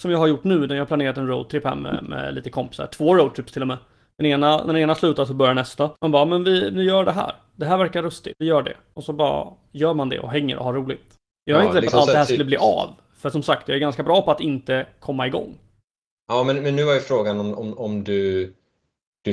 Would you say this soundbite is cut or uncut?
cut